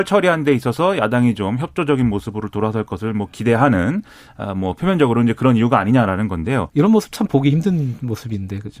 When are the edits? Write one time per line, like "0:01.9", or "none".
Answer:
0:06.7